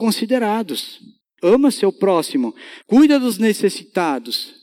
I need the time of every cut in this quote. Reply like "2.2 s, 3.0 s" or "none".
1.4 s, 2.8 s